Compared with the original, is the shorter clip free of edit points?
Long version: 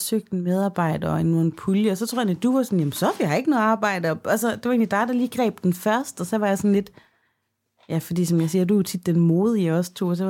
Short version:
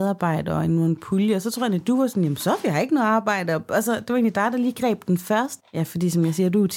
no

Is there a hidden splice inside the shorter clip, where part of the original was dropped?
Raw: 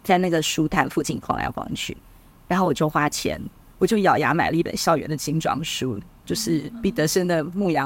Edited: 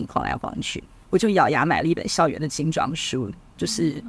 yes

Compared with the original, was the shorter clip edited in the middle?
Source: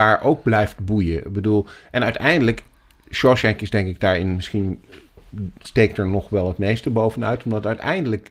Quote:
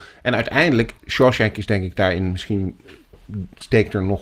yes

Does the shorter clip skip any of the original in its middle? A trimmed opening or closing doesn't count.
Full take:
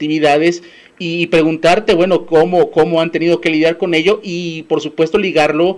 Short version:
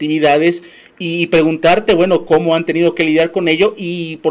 yes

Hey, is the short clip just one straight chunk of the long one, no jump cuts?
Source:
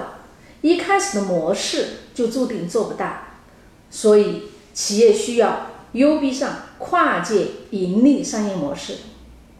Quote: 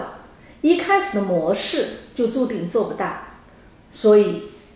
yes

